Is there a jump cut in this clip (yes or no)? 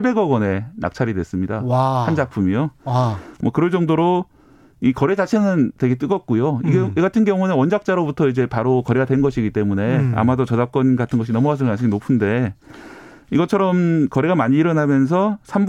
no